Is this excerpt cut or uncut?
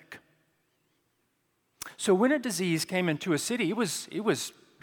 uncut